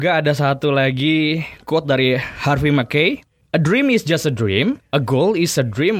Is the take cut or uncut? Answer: uncut